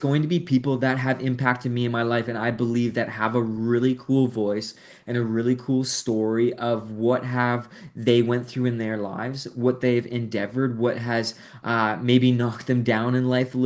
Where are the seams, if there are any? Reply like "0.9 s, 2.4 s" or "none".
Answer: none